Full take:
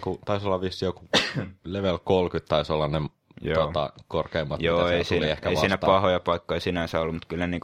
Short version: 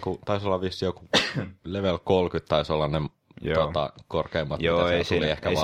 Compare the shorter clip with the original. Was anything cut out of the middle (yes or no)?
no